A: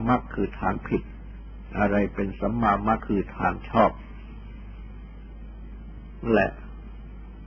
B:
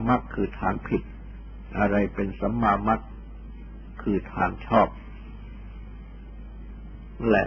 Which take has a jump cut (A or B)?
A